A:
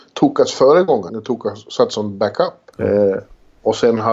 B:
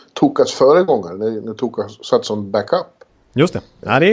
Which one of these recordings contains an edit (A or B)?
A